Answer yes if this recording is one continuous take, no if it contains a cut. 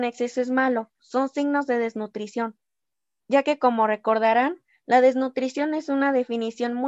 no